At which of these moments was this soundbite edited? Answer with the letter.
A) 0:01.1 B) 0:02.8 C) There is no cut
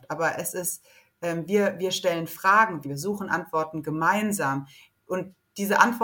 B